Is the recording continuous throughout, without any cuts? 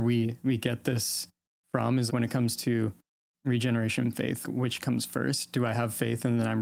no; 2 cuts; at 2.1 s, 4.4 s

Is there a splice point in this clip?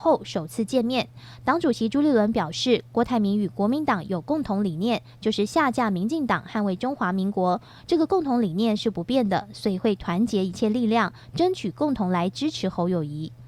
no; 0 cuts

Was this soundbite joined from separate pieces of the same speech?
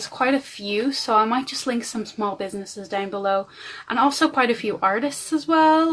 no; 0 cuts

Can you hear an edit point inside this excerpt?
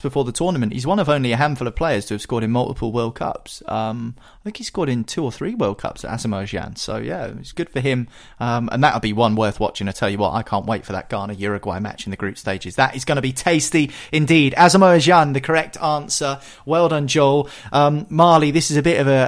yes; 1 cut; at 7.5 s

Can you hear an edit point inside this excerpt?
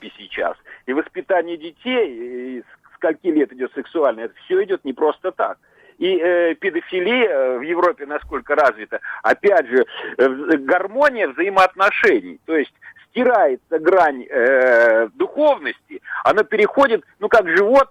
no; 0 cuts

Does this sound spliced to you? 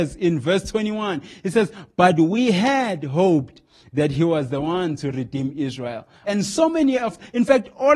yes; 1 cut; at 6.2 s

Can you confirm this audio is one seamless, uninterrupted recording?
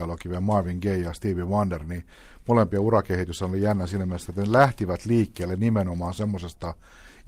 yes; 0 cuts

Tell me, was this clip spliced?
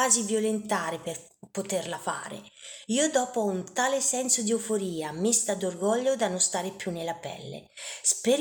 no; 0 cuts

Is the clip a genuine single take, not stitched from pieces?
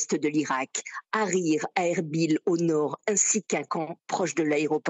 yes; 0 cuts

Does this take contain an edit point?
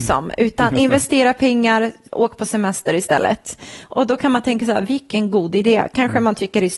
yes; 1 cut; at 2.1 s

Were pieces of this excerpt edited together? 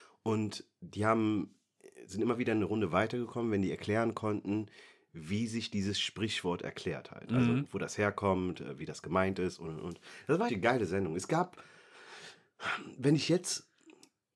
yes; 1 cut; at 10.5 s

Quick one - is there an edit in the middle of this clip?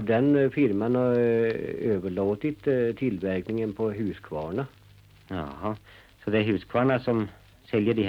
no; 0 cuts

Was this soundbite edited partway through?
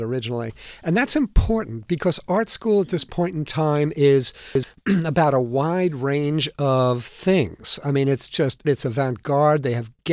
yes; 1 cut; at 8.6 s

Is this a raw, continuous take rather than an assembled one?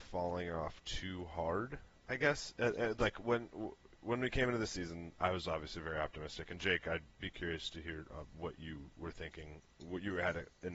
yes; 0 cuts

